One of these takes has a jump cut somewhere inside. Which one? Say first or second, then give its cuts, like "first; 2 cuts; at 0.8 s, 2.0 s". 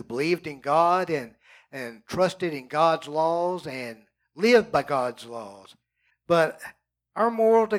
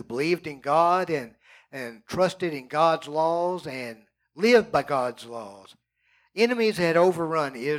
first; 1 cut; at 6.1 s